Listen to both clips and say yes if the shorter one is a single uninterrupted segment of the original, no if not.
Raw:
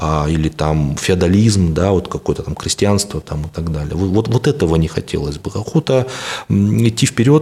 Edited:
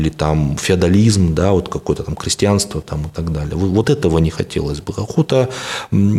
no